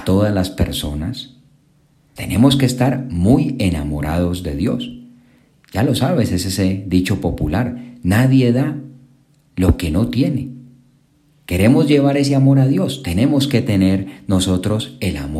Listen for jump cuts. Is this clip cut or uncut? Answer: cut